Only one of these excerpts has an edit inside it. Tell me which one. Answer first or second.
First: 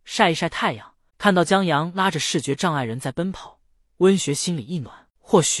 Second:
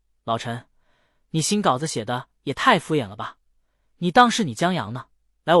first